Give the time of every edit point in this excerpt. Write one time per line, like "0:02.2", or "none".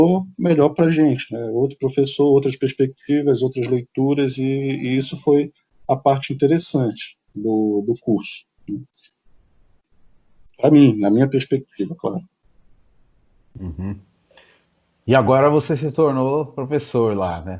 none